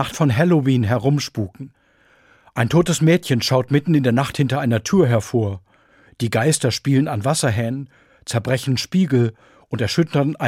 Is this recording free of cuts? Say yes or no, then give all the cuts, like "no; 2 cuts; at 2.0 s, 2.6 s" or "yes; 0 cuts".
yes; 0 cuts